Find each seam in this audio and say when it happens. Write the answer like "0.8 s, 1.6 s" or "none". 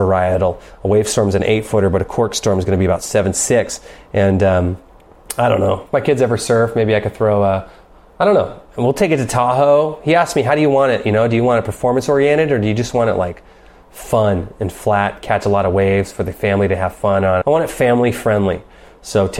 17.4 s